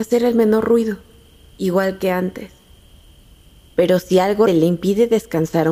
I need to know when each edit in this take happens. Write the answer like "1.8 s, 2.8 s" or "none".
4.5 s